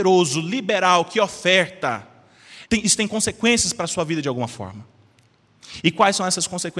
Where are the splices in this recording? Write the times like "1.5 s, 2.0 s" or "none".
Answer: 2.7 s